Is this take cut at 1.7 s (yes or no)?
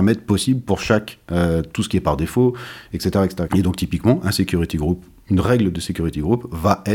no